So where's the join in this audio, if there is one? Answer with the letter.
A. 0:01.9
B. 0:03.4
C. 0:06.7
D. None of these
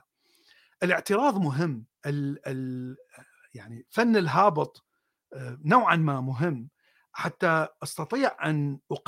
A